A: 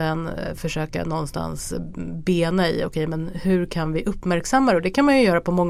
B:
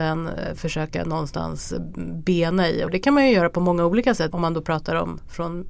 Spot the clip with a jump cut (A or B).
B